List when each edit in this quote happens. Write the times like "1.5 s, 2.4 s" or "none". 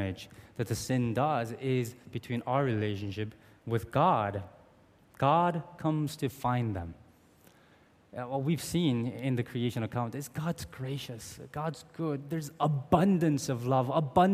none

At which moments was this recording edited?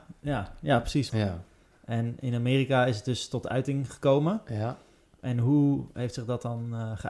1.1 s

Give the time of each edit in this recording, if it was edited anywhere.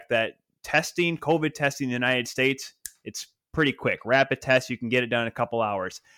none

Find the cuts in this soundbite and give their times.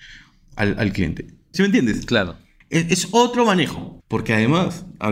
1.5 s, 4.0 s

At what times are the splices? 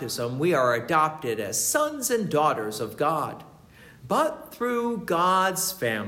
4.0 s

